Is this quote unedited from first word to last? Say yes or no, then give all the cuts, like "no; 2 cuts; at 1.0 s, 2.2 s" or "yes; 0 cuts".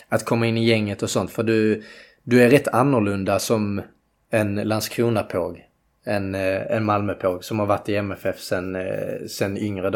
yes; 0 cuts